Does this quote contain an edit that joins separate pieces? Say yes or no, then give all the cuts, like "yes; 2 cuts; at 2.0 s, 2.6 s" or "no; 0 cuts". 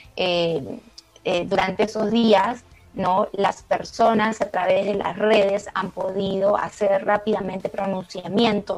no; 0 cuts